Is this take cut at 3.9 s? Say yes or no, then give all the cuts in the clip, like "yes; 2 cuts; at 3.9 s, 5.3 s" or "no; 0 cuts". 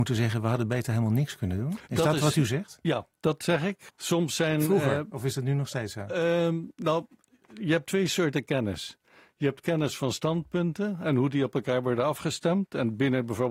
yes; 1 cut; at 3.9 s